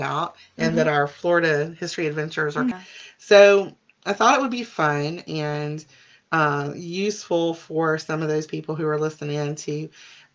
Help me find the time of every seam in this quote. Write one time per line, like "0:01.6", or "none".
0:02.7